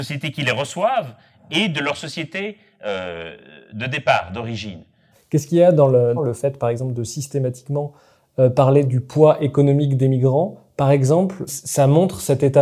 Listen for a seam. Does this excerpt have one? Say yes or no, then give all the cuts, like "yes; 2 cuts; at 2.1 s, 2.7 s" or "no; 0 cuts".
yes; 2 cuts; at 6.2 s, 11.5 s